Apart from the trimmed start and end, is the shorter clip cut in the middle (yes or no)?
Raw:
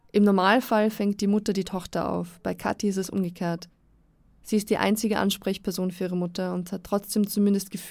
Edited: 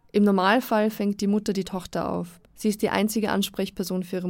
yes